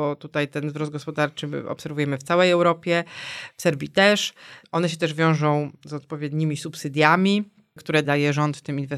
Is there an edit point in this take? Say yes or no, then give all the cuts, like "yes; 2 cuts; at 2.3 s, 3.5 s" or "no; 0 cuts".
yes; 2 cuts; at 4.6 s, 8.0 s